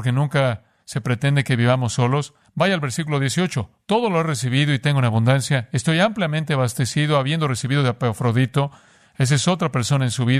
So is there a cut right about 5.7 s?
no; 0 cuts

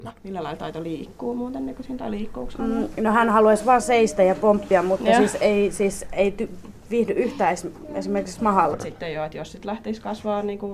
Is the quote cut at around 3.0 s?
no; 1 cut; at 8.7 s

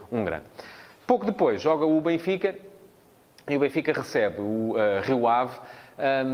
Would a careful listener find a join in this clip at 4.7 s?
no; 0 cuts

